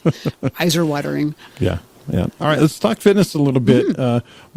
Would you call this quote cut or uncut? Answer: cut